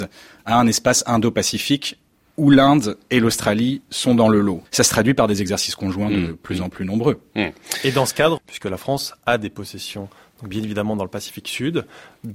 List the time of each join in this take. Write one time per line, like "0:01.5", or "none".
0:04.7
0:08.4